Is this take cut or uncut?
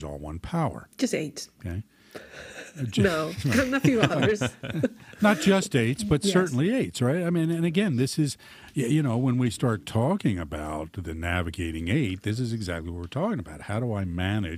uncut